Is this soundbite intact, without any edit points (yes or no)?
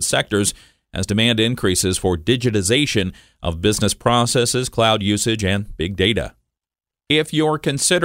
yes